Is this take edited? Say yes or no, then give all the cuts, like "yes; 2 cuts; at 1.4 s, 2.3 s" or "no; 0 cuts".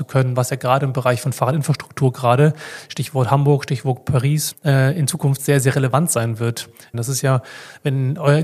yes; 2 cuts; at 4.5 s, 6.9 s